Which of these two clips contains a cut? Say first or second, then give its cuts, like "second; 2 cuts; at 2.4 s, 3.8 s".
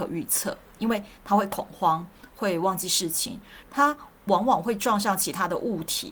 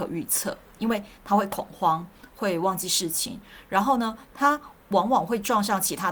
first; 1 cut; at 3.6 s